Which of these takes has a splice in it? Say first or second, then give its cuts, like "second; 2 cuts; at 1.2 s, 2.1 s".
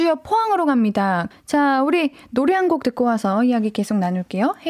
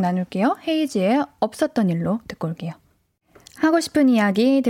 first; 1 cut; at 1.3 s